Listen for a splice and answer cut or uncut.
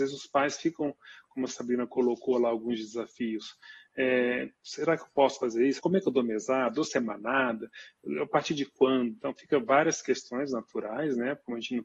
cut